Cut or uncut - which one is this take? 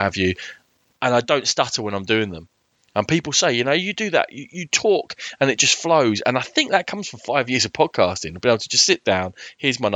uncut